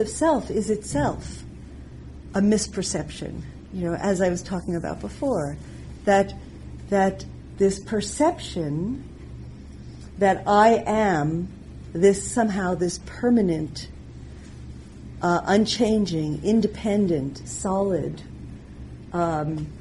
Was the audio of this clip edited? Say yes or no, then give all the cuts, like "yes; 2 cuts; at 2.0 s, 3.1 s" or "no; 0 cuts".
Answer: yes; 1 cut; at 7.5 s